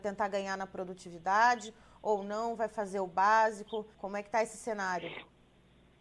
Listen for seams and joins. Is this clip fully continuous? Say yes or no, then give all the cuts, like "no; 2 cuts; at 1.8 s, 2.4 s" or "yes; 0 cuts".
no; 1 cut; at 3.9 s